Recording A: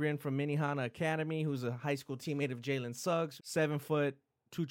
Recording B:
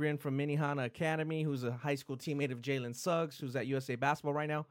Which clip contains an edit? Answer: A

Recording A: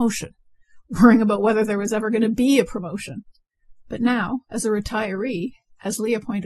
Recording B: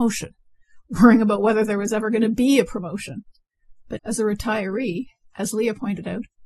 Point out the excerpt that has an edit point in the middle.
B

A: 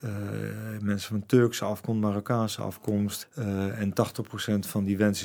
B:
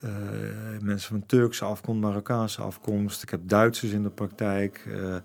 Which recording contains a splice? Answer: A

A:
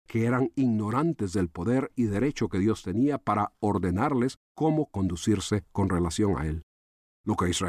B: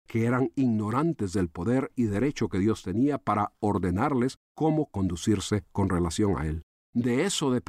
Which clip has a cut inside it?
B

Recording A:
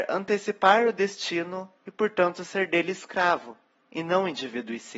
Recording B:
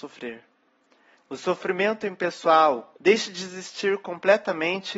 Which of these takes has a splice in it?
B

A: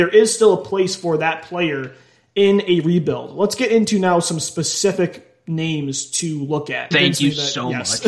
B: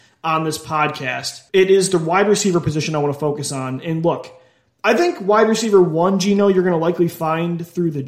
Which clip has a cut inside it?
A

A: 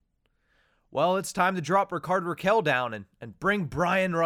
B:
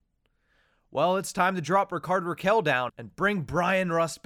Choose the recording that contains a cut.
B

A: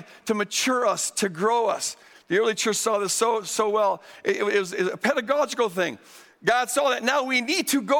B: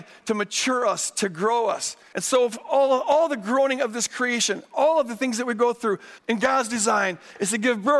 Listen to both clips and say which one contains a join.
B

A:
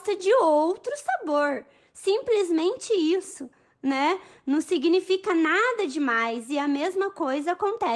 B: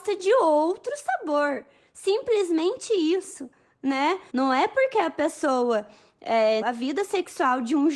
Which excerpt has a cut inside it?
B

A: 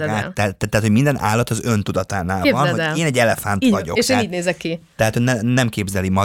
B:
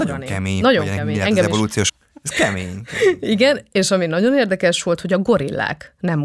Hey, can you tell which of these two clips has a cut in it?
B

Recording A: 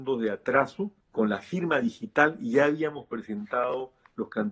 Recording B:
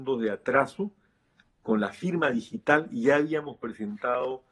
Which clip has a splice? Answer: A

